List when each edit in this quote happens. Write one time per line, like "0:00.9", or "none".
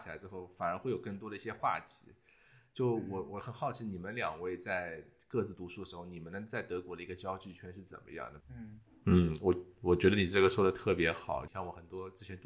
0:08.4
0:11.5